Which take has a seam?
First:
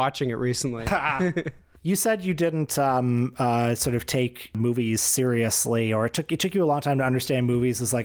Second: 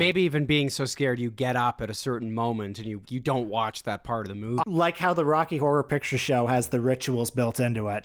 second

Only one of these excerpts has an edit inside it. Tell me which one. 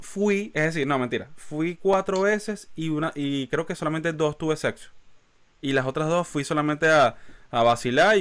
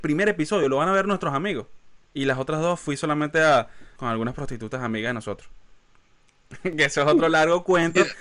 second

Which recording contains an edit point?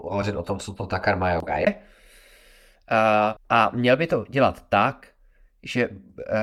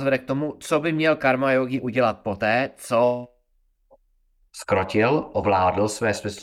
first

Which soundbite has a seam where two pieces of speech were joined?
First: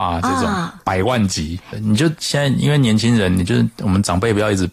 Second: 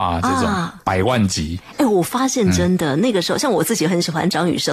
first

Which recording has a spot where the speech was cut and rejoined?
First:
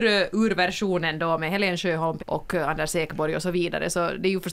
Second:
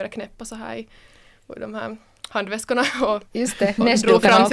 first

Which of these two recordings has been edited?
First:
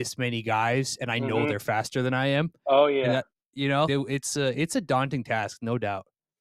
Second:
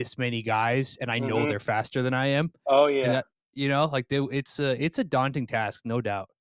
first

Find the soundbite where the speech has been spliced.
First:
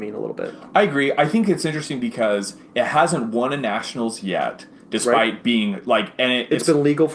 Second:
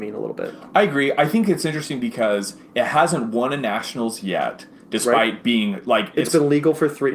second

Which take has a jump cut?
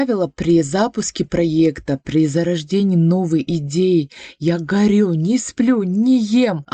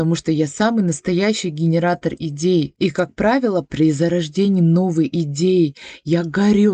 second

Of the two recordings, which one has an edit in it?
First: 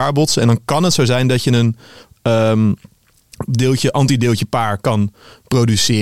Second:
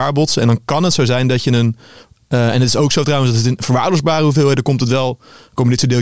second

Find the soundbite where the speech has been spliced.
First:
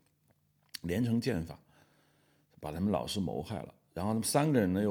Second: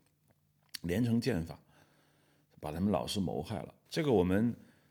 second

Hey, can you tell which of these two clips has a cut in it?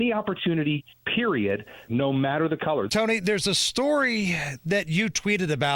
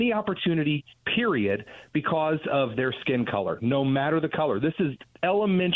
first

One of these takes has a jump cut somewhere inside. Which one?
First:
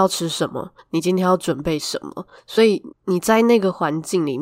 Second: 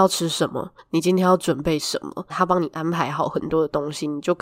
second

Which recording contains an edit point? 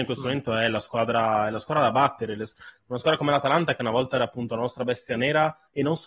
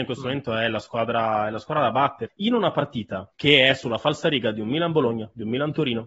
second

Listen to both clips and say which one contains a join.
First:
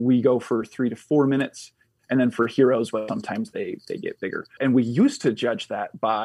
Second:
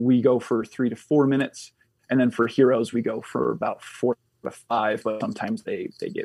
first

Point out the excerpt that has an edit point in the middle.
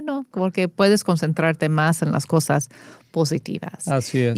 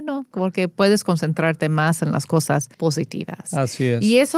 second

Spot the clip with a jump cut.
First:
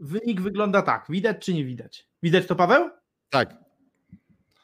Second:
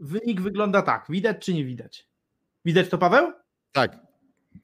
first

